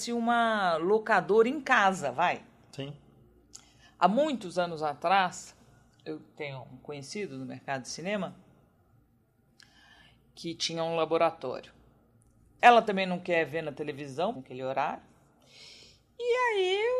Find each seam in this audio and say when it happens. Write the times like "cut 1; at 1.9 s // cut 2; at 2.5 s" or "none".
cut 1; at 12.6 s // cut 2; at 14.4 s